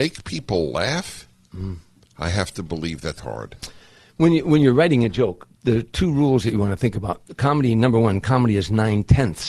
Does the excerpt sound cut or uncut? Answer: cut